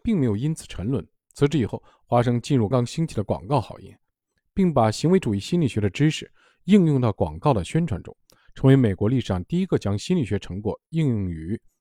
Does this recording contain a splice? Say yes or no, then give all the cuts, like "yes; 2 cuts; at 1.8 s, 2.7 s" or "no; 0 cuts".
yes; 1 cut; at 2.7 s